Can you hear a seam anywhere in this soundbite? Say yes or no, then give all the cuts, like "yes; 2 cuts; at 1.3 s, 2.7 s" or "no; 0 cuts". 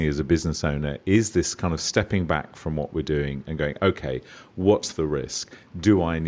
no; 0 cuts